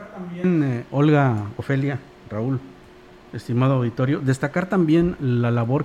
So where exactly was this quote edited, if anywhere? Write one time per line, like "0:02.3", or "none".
none